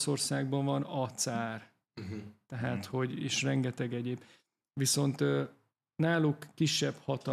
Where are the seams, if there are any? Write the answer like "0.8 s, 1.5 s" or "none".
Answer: none